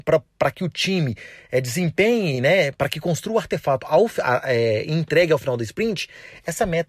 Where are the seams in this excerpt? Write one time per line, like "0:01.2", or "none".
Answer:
none